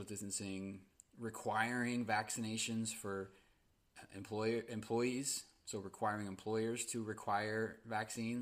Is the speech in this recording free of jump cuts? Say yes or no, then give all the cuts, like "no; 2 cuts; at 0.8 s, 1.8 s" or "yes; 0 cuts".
yes; 0 cuts